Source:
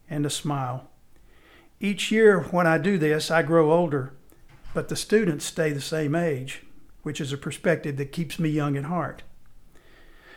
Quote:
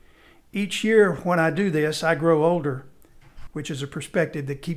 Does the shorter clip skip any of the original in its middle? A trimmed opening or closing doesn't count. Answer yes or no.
yes